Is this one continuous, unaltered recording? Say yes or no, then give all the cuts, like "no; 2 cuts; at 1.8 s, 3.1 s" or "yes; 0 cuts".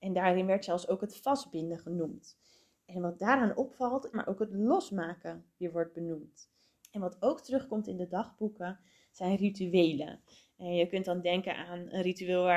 no; 2 cuts; at 4.1 s, 6.8 s